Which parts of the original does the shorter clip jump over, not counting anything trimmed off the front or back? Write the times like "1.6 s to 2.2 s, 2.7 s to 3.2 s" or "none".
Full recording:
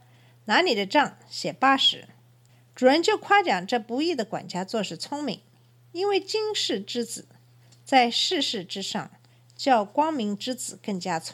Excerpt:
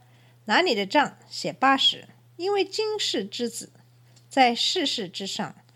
2.3 s to 5.8 s